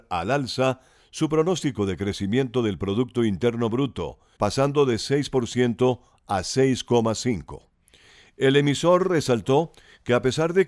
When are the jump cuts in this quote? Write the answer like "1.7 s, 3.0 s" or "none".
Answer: 4.4 s